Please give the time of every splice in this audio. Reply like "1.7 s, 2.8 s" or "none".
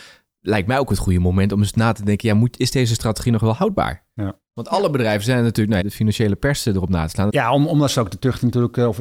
5.8 s, 7.3 s